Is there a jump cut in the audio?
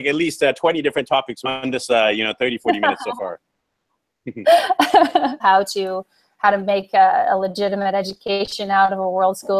yes; 1 cut; at 5.4 s

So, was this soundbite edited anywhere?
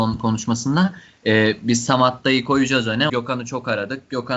yes; 1 cut; at 3.1 s

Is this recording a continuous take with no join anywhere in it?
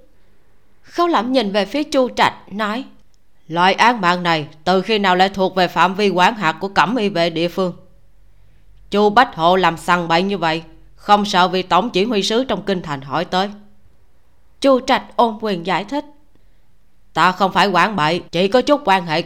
no; 1 cut; at 18.3 s

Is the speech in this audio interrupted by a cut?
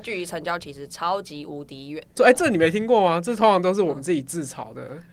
yes; 1 cut; at 2.2 s

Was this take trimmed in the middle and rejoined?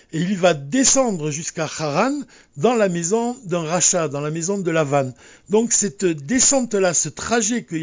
no; 0 cuts

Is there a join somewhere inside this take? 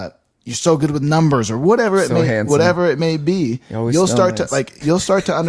no; 0 cuts

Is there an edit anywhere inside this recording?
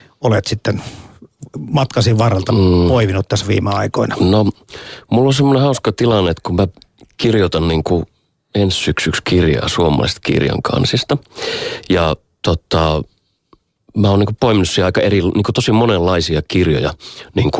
no; 0 cuts

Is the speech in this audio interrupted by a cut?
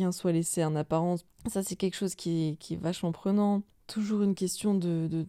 no; 0 cuts

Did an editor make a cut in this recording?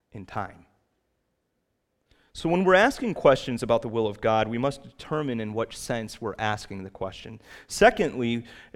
no; 0 cuts

